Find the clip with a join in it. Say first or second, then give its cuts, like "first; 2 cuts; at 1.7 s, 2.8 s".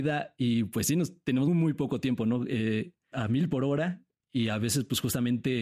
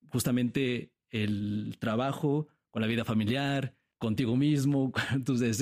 first; 2 cuts; at 1.5 s, 3.1 s